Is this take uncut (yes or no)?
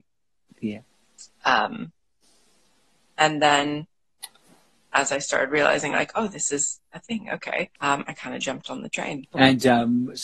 no